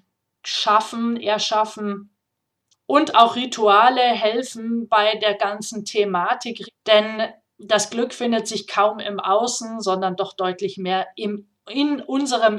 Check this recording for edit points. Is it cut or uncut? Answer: cut